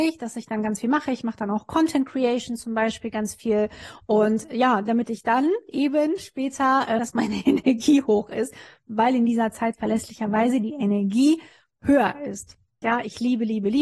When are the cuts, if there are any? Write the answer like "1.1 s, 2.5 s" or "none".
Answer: 7.0 s, 12.8 s

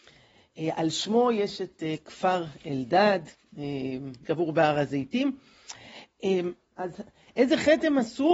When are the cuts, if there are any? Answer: 4.2 s, 6.7 s

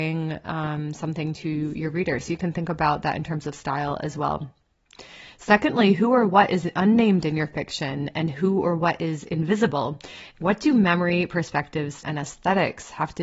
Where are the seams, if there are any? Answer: 10.3 s, 12.0 s

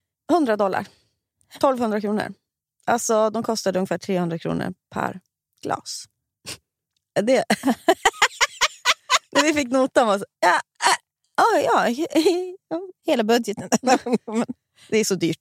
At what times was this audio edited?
none

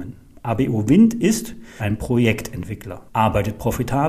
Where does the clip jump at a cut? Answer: 1.8 s, 3.1 s

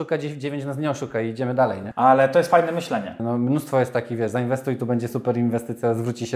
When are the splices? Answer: 1.9 s, 3.2 s

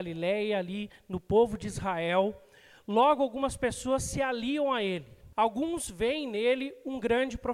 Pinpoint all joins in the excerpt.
5.3 s

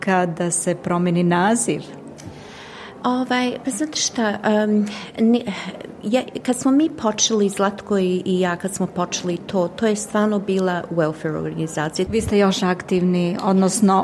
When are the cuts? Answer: 12.1 s

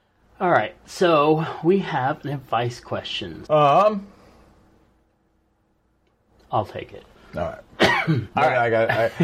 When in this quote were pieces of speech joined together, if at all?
3.5 s, 8.3 s

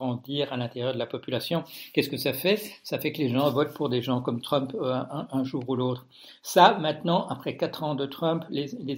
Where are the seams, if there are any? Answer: none

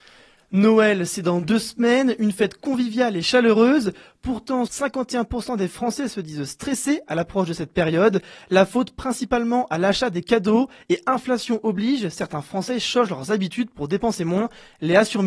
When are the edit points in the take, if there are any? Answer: 4.7 s

